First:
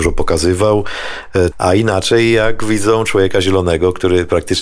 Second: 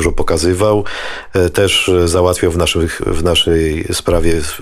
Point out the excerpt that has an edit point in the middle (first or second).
first